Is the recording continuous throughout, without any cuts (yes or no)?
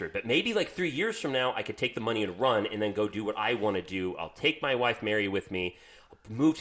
yes